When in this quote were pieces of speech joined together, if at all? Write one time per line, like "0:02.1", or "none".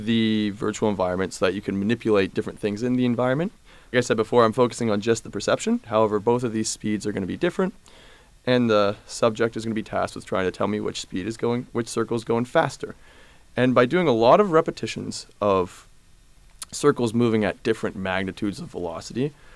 0:03.9
0:05.8